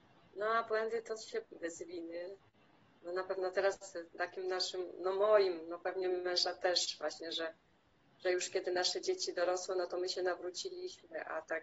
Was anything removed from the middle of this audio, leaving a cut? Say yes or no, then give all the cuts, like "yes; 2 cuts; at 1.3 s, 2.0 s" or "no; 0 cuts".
yes; 1 cut; at 1.4 s